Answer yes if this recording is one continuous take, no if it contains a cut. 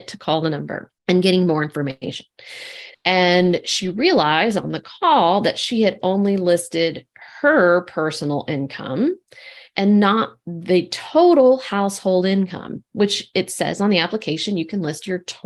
no